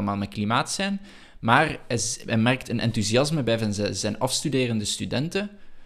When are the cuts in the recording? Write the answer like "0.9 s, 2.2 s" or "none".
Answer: none

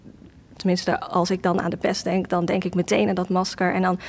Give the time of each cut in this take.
none

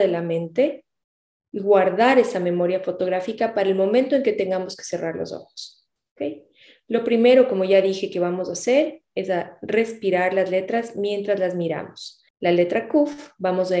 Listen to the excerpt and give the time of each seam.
12.3 s

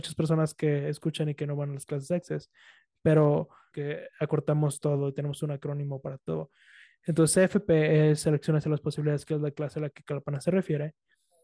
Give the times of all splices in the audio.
3.7 s

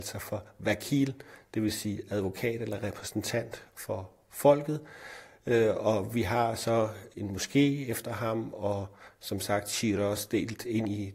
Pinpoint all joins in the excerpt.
none

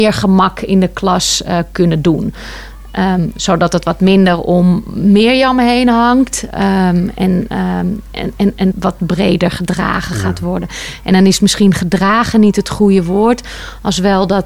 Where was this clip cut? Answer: 8.7 s

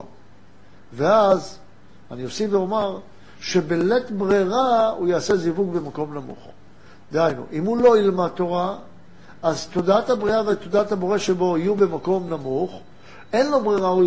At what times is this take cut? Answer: none

